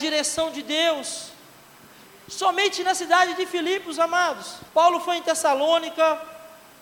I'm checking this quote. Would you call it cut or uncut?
cut